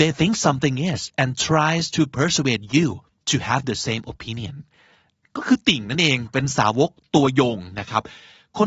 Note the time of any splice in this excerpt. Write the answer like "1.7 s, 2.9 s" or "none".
none

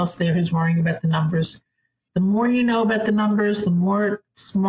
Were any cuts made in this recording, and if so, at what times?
none

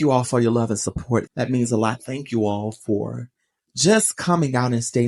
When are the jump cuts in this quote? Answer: 1.3 s

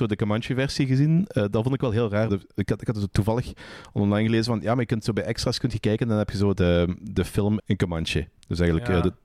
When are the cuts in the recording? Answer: 2.3 s, 6.6 s, 7.6 s

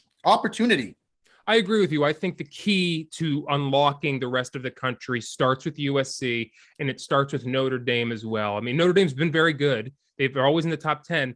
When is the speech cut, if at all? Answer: none

